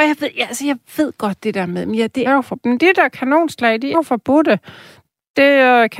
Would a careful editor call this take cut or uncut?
cut